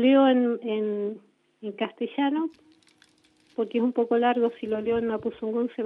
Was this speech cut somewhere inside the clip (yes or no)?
no